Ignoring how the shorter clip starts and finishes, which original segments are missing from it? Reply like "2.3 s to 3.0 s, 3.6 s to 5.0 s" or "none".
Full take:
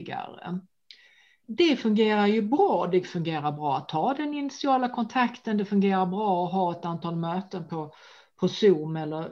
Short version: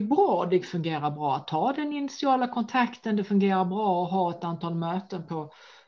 none